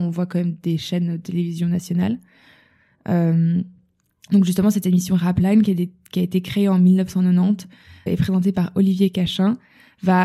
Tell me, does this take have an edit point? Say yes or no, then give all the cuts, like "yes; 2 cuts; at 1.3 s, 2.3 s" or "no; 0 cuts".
yes; 1 cut; at 8.1 s